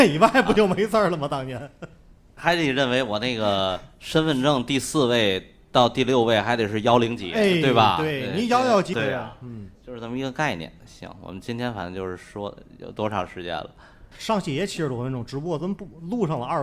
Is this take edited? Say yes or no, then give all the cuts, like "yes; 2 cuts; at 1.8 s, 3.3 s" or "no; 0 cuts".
yes; 3 cuts; at 2.4 s, 8.9 s, 14.1 s